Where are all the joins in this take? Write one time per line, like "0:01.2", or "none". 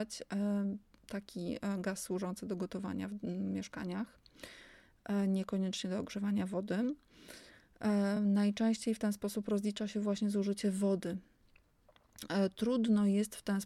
none